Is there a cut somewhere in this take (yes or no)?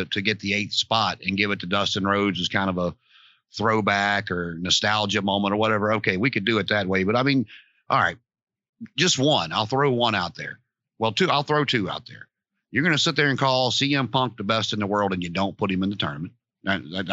no